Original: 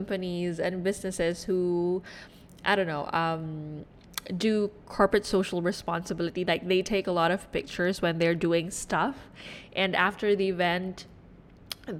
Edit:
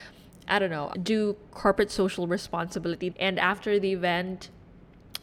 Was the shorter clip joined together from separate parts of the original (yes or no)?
yes